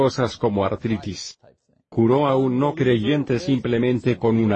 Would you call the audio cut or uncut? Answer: cut